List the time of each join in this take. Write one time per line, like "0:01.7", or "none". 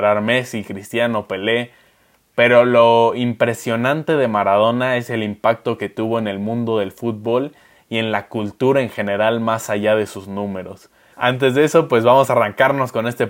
0:11.1